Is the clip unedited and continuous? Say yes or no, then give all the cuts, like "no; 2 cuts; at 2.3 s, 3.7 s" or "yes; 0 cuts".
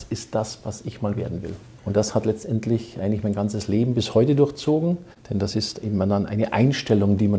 yes; 0 cuts